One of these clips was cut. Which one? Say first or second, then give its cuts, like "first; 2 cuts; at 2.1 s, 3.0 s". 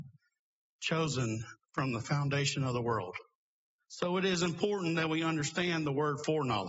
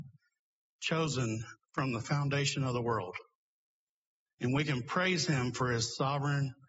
first; 1 cut; at 3.8 s